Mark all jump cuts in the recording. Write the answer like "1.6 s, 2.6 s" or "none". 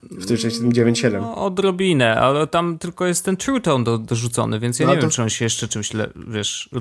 none